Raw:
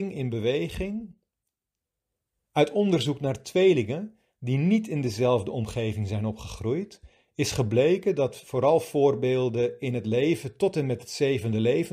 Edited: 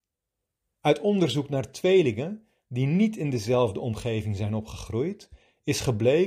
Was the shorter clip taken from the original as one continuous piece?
yes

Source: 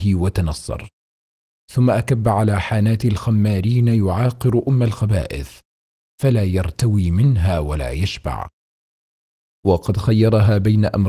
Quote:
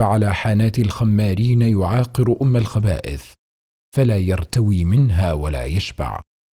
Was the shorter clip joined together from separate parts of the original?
no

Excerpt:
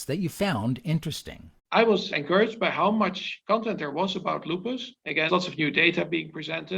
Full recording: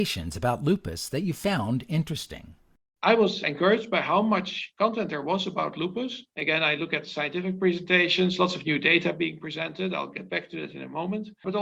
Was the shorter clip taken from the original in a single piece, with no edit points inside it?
no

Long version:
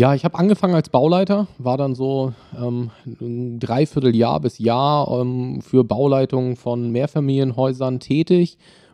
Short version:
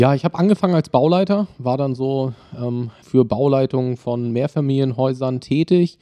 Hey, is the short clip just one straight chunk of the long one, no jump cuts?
no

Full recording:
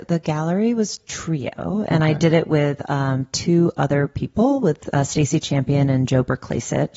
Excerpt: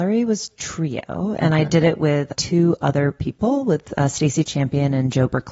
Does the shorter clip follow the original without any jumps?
no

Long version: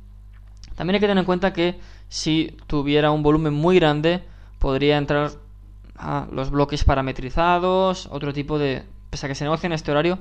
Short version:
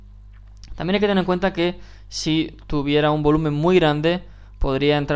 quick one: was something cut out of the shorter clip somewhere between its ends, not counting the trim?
no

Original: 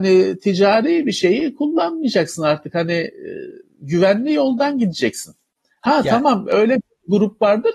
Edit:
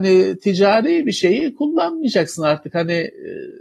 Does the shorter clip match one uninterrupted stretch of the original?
yes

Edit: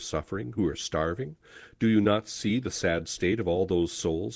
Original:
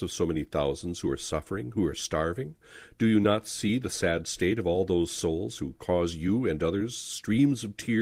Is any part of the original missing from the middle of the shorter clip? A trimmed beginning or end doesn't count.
no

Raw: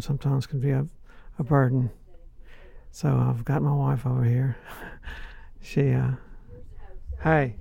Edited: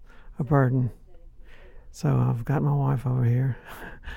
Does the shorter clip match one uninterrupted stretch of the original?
yes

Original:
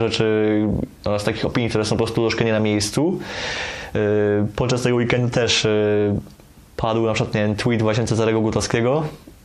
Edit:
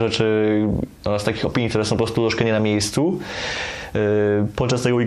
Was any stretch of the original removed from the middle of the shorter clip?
no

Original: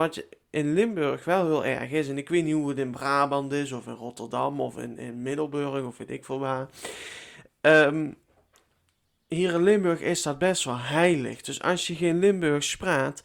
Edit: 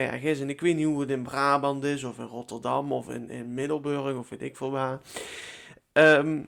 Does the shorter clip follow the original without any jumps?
yes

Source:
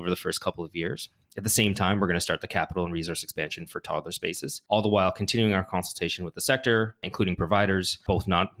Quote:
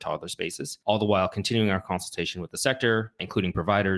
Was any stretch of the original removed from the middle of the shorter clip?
no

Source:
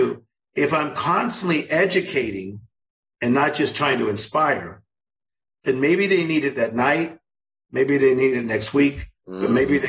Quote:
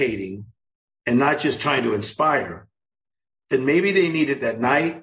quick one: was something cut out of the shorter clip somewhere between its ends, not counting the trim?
no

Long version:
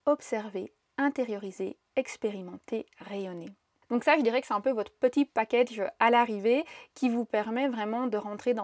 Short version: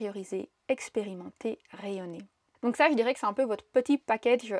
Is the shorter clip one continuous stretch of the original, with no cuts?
yes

